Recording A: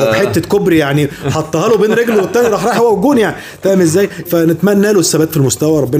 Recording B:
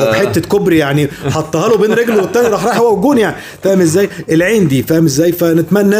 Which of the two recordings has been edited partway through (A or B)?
A